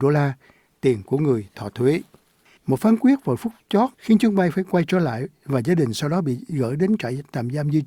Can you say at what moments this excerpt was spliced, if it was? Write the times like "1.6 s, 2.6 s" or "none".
2.6 s, 3.9 s